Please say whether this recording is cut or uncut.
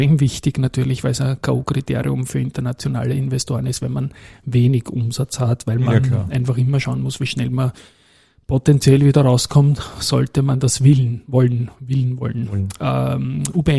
uncut